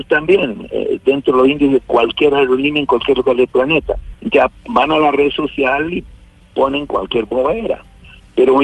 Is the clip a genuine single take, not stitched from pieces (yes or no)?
no